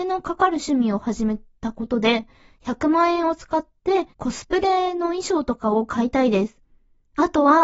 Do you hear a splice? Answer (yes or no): yes